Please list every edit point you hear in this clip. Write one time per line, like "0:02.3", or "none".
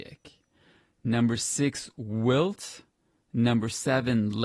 none